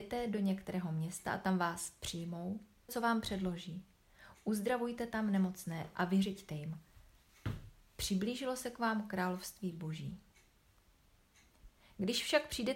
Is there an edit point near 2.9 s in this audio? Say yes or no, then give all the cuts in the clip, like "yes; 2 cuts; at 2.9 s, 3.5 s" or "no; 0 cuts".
yes; 1 cut; at 2.9 s